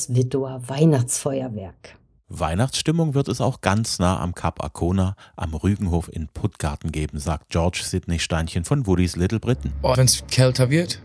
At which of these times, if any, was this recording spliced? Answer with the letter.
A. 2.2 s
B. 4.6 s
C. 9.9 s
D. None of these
C